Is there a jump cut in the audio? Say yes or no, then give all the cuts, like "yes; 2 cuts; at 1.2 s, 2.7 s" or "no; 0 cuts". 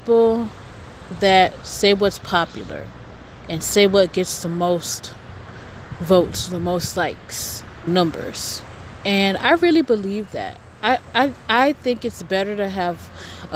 yes; 1 cut; at 7.9 s